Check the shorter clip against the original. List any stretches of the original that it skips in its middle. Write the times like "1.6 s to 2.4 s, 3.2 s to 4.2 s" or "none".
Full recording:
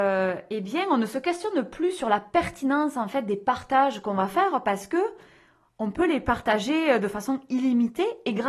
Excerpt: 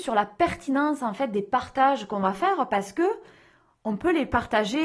none